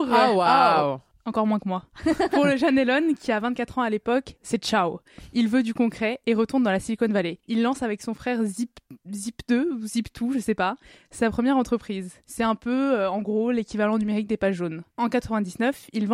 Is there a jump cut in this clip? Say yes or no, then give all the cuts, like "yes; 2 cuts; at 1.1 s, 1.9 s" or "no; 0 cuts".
yes; 1 cut; at 4.4 s